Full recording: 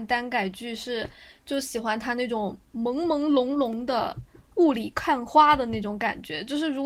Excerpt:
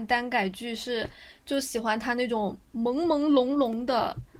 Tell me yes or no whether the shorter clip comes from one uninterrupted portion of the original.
yes